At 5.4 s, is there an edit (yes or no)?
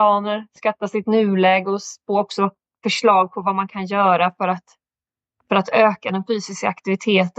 no